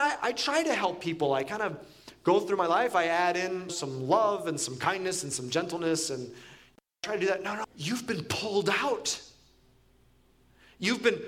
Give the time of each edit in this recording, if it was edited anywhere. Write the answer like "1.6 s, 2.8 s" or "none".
3.7 s, 7.6 s